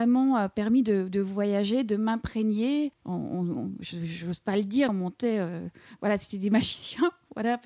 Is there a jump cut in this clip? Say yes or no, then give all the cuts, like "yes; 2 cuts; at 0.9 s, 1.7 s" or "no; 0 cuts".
yes; 2 cuts; at 3.0 s, 4.9 s